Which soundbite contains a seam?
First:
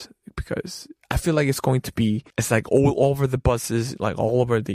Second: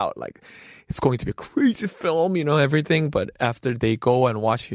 first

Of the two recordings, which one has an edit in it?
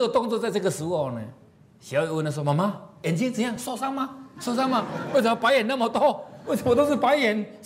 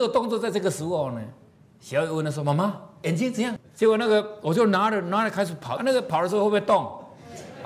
second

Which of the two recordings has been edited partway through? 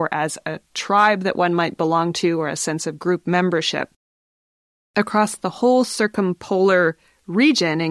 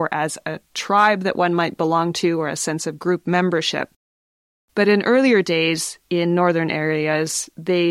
second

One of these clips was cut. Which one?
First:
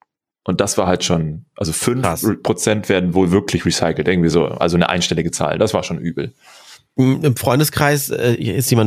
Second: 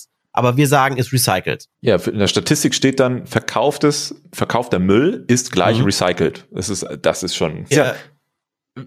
second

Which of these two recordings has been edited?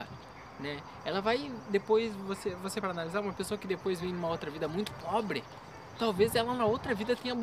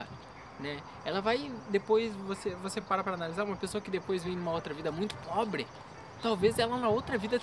first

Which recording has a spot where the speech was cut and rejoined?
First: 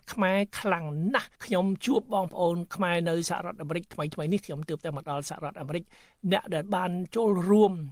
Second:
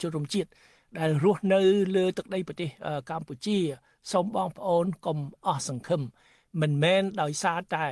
first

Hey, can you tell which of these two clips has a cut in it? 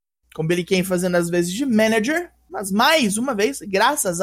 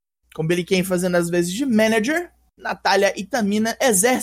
first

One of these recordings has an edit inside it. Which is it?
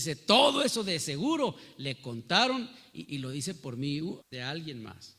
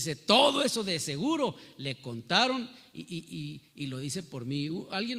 first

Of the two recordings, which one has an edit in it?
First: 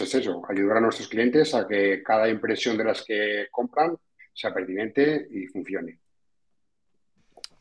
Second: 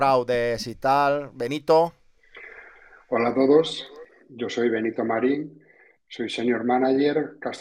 first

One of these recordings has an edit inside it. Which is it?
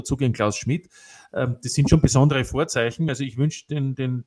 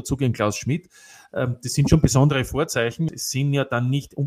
second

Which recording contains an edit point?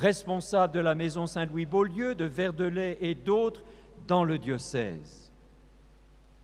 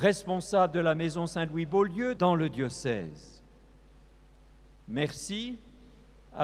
second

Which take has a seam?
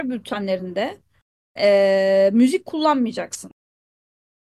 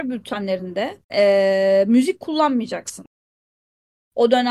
second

